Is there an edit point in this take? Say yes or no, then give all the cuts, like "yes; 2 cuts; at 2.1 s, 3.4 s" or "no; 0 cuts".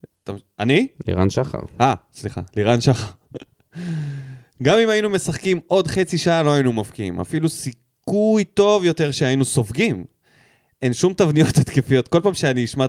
no; 0 cuts